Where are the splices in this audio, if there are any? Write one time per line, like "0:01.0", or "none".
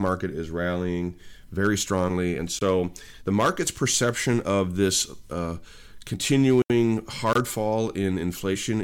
none